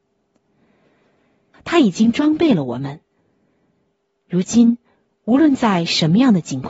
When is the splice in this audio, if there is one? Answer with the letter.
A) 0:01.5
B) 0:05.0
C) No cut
A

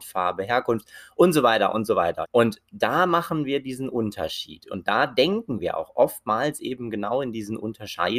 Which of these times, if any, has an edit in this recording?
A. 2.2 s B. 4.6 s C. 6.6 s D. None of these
A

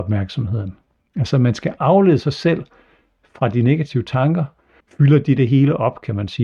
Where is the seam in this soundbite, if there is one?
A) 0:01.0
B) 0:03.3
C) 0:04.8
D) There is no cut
C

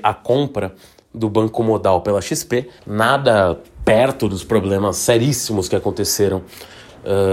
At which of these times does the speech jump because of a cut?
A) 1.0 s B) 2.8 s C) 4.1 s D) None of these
B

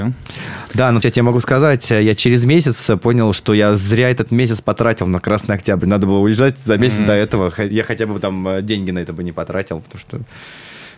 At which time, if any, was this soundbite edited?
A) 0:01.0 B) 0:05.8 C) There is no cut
A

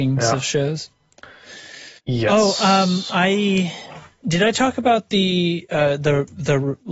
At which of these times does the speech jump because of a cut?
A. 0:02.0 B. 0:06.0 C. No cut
A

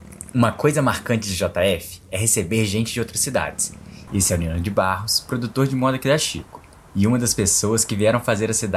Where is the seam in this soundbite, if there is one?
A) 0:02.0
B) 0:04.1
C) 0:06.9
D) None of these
B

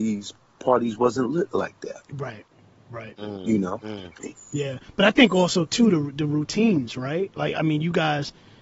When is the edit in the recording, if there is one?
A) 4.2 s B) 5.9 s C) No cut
A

